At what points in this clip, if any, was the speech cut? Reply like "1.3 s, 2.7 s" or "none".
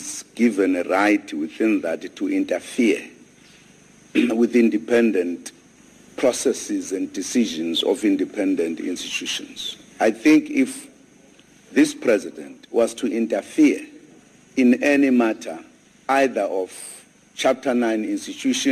none